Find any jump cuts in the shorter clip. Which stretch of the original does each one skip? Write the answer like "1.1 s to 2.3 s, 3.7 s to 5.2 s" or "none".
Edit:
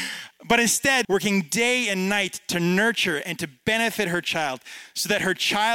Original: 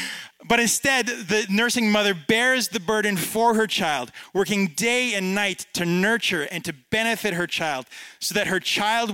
1.0 s to 4.3 s